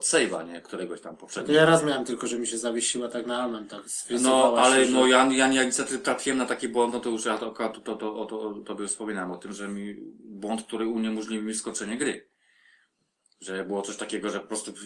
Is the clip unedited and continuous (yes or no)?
yes